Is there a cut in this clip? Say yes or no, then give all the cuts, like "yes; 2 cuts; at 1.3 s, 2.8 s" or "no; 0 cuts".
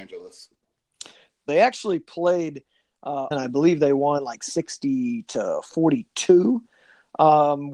yes; 2 cuts; at 1.5 s, 3.3 s